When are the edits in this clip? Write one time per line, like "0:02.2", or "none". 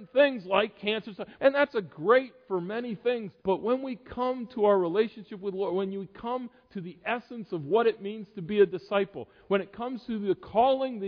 0:01.4
0:03.4